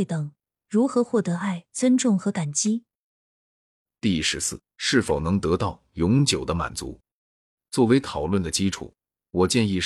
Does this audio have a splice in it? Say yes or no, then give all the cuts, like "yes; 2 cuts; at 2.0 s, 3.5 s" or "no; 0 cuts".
yes; 2 cuts; at 4.7 s, 7.6 s